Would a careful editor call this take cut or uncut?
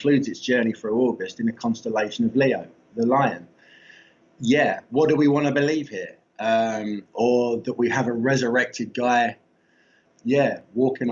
cut